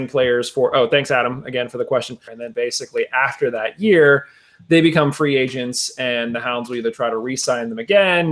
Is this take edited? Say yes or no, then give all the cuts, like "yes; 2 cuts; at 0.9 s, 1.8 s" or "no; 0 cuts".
yes; 1 cut; at 2.3 s